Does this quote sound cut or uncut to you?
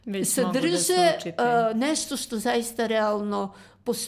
uncut